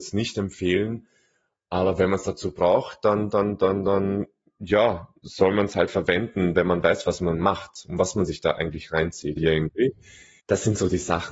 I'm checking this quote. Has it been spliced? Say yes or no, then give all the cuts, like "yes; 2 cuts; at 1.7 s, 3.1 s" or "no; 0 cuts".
yes; 1 cut; at 9.4 s